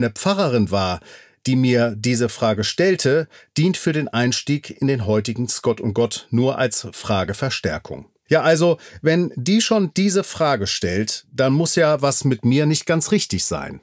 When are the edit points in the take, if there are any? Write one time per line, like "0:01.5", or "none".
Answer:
0:08.3

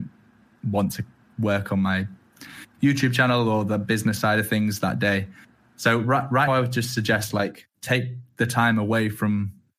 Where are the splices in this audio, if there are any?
0:06.5
0:07.7

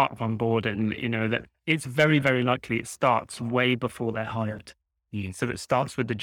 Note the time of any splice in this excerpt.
none

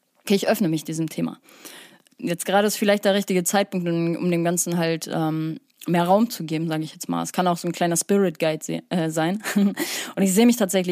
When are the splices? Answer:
none

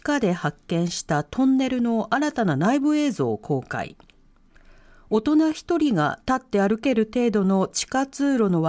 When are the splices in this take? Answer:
none

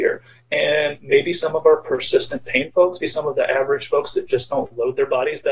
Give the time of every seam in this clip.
0:03.0

